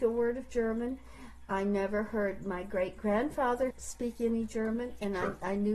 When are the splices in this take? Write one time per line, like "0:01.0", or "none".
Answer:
0:03.7